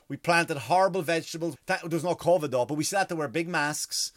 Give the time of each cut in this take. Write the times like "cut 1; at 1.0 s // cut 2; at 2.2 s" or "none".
cut 1; at 1.6 s